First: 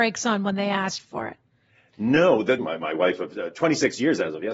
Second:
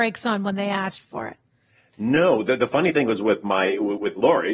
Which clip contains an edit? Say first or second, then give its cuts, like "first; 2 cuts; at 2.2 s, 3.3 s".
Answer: first; 1 cut; at 2.6 s